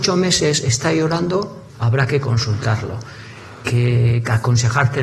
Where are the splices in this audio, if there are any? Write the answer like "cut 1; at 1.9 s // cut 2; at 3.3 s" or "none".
cut 1; at 1.7 s // cut 2; at 3.6 s